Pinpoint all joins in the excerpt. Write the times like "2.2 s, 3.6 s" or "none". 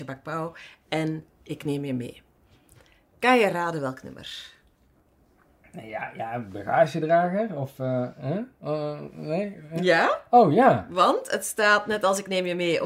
none